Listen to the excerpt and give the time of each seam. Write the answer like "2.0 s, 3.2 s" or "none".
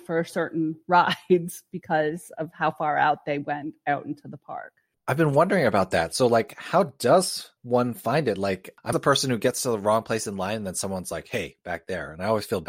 7.6 s, 8.9 s